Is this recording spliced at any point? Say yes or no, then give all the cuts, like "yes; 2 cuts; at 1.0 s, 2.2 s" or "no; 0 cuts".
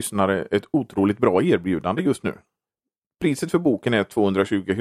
no; 0 cuts